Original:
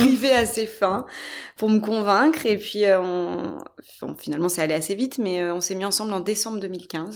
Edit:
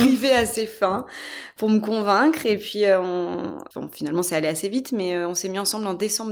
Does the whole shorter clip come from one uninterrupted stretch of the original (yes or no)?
no